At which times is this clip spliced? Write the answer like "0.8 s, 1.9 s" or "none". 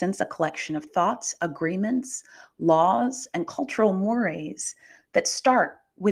none